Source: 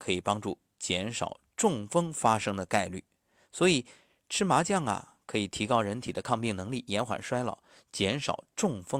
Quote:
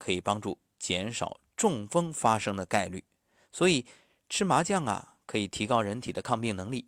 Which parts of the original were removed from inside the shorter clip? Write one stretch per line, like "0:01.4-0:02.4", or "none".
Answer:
none